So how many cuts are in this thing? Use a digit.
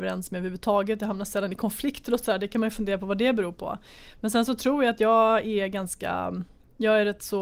0